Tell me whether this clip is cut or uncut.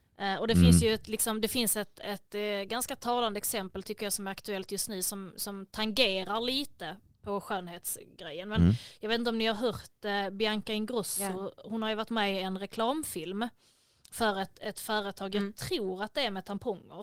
uncut